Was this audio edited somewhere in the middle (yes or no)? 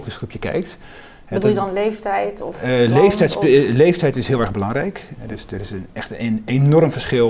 yes